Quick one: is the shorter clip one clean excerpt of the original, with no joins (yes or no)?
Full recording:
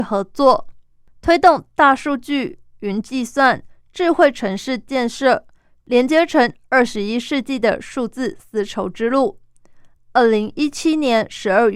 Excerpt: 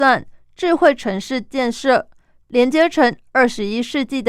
yes